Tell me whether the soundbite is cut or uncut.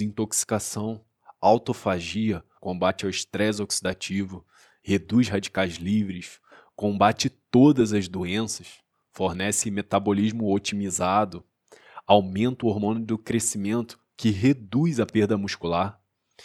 cut